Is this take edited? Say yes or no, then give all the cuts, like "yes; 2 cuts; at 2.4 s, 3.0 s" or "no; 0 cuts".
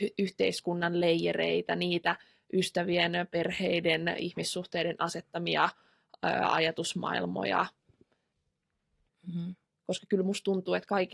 yes; 1 cut; at 9.1 s